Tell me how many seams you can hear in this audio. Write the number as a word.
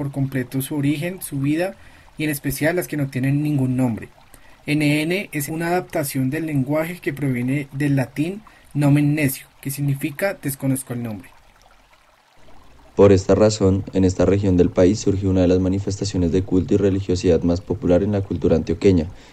one